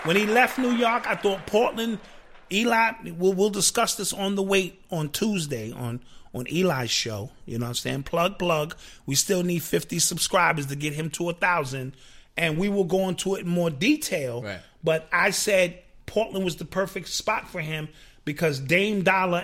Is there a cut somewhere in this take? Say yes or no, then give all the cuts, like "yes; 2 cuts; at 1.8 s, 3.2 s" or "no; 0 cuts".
no; 0 cuts